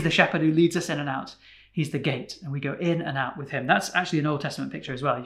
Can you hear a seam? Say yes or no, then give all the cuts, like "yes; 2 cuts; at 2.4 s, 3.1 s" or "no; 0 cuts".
no; 0 cuts